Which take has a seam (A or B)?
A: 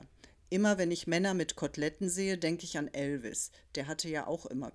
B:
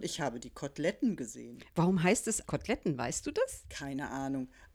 B